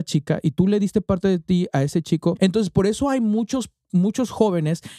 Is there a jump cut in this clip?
yes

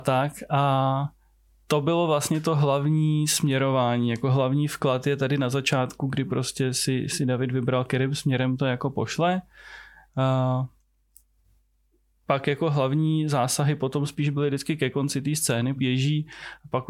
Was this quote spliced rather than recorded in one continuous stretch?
yes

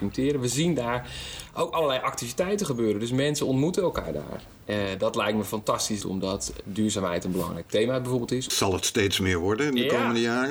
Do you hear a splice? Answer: yes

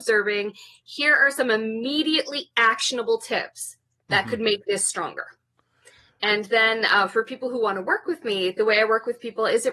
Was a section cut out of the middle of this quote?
no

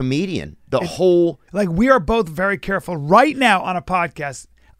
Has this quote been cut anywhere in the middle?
yes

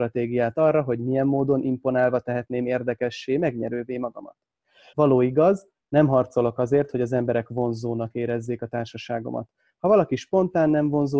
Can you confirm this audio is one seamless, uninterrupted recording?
no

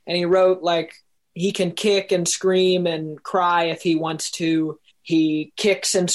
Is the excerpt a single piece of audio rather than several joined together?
no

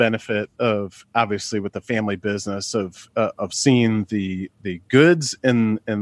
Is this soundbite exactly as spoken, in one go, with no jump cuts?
yes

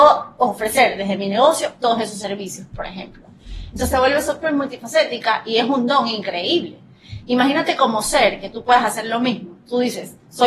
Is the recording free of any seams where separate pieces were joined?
yes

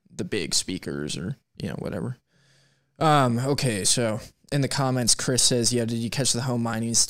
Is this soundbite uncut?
yes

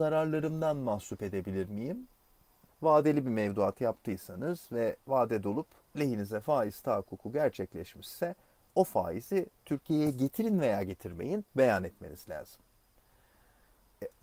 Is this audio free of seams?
no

